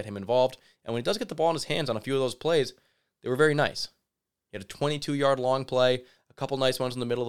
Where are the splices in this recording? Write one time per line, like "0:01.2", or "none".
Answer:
none